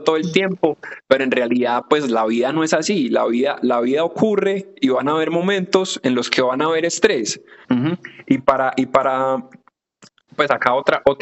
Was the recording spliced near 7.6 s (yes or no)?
yes